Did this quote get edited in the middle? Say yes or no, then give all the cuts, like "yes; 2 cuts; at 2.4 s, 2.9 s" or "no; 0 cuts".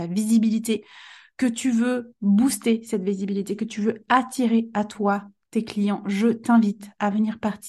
no; 0 cuts